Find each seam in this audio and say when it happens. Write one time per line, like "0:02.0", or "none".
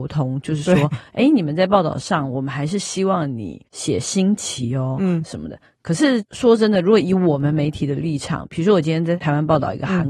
none